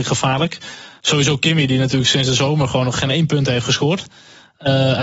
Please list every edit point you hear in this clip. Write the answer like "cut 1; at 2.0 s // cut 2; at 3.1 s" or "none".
cut 1; at 0.9 s

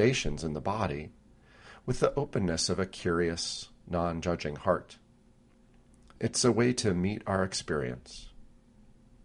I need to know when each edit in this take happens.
none

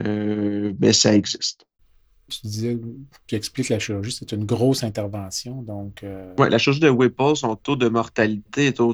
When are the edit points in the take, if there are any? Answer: cut 1; at 2.3 s

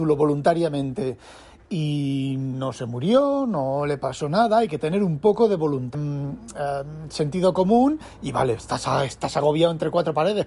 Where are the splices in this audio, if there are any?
cut 1; at 5.9 s

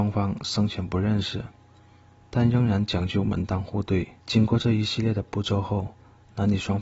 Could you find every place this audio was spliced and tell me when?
cut 1; at 4.2 s

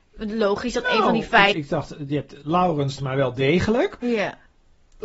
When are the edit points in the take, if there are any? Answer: cut 1; at 1.5 s // cut 2; at 3.0 s

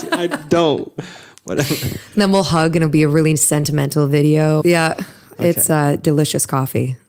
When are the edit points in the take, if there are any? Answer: cut 1; at 4.6 s

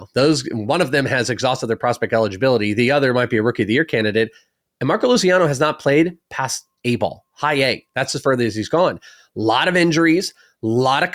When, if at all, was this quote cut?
none

